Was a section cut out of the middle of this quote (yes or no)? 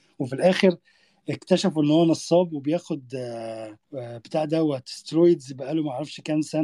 yes